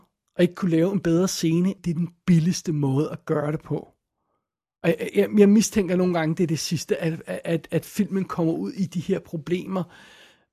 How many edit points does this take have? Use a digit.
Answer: 1